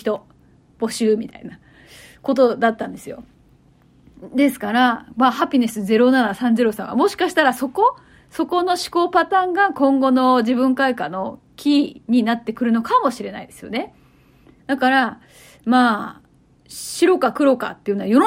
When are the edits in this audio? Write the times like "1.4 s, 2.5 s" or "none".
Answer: 14.6 s